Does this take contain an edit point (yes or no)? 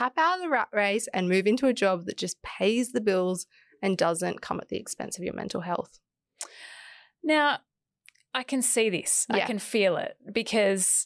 no